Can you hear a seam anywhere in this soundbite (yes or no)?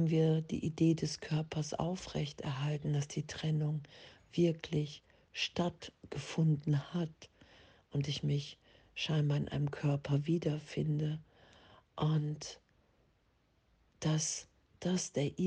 no